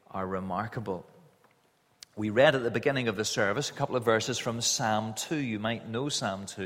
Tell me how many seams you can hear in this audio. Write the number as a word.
zero